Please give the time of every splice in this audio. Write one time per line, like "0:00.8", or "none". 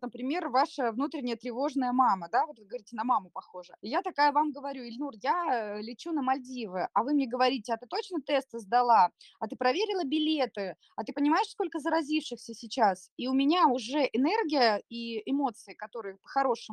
0:03.8

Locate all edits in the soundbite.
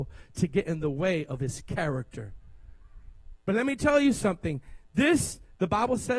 0:03.4

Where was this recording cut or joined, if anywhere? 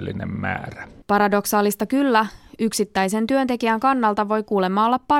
0:01.0

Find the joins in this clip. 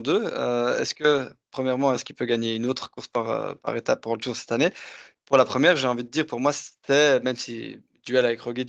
0:02.0

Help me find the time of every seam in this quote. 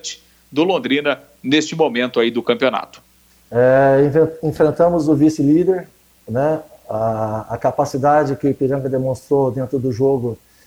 none

